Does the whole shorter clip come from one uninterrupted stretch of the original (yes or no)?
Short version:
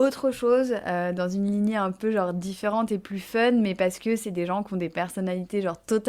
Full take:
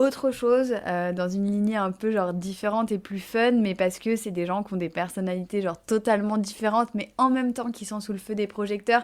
yes